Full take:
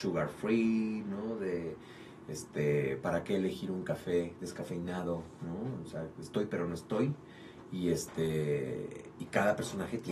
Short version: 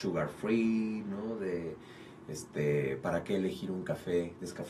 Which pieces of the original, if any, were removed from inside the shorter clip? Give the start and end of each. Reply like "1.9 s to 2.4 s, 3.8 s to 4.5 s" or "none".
none